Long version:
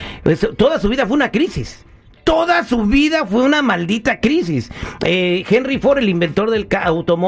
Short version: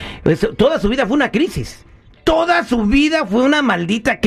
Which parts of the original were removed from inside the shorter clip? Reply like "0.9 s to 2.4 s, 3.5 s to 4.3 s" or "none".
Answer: none